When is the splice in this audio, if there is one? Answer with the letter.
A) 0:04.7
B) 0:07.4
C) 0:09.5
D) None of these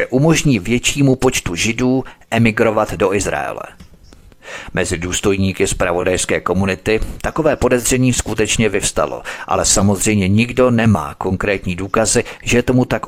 D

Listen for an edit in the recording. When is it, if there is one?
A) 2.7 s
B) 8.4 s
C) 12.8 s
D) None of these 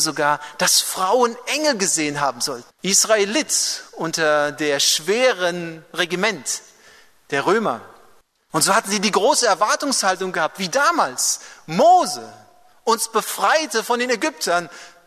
A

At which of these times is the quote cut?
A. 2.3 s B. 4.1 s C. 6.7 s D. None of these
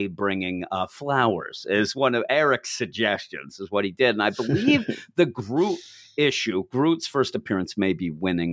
D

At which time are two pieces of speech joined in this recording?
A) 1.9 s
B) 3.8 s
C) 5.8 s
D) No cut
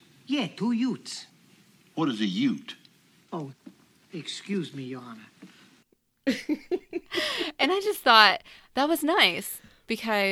C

